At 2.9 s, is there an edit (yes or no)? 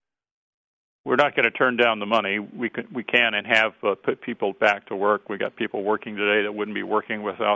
no